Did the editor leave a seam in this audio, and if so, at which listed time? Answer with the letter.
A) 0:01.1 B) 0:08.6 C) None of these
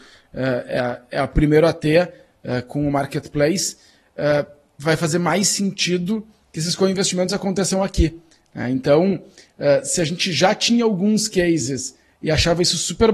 C